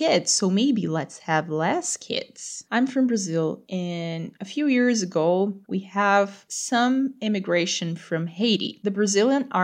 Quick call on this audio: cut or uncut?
cut